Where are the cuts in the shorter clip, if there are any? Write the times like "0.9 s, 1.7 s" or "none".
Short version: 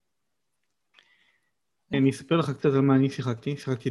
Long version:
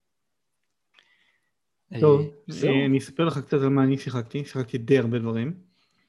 1.9 s

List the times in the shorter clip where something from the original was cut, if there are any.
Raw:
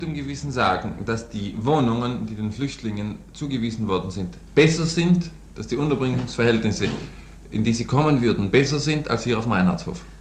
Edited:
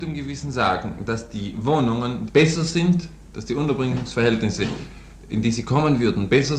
2.3 s

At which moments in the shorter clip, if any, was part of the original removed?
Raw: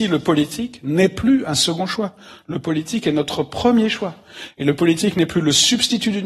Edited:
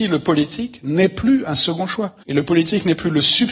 2.2 s

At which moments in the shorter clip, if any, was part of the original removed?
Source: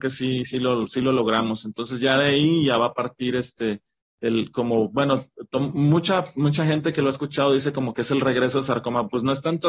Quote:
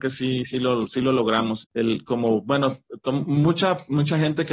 1.6 s

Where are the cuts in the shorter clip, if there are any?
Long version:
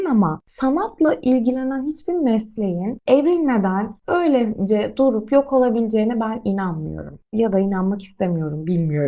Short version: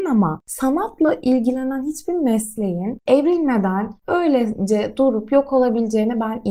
none

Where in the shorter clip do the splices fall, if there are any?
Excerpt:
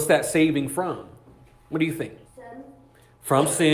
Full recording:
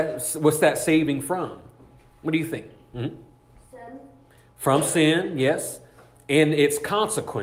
2.3 s

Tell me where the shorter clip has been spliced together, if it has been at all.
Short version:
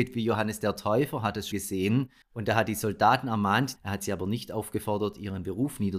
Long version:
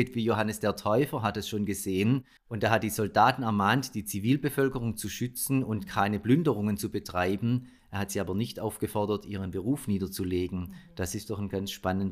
1.5 s, 3.7 s

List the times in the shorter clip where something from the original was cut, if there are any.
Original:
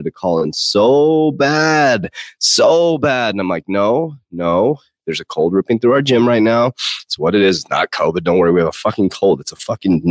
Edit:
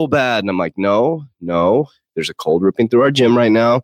none

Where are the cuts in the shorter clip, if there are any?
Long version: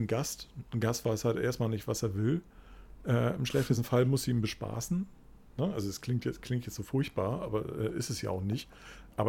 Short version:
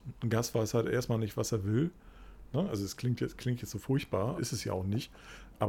2.5 s, 4.4 s

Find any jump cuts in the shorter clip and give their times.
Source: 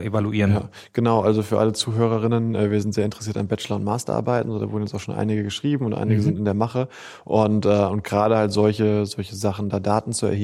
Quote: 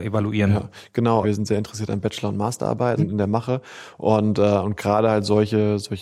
1.2 s, 3.0 s

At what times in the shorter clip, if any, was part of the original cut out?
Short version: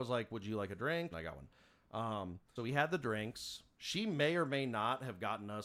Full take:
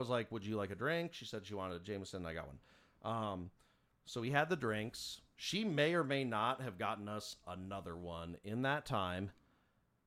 1.1 s, 2.6 s

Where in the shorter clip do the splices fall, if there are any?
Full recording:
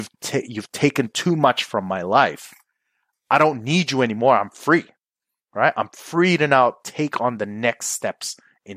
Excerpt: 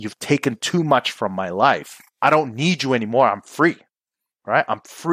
2.1 s

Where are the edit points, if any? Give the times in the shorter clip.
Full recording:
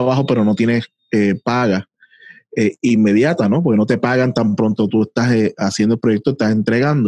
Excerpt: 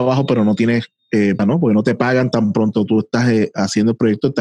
1.4 s

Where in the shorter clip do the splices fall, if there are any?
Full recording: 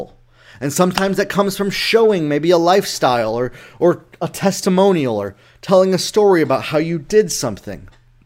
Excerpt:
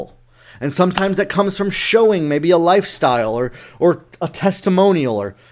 none

